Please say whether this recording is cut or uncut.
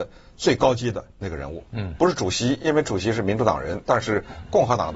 uncut